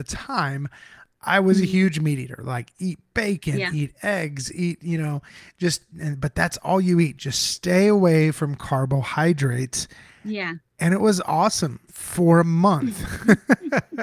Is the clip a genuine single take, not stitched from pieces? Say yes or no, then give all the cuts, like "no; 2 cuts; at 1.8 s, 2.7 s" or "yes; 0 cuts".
yes; 0 cuts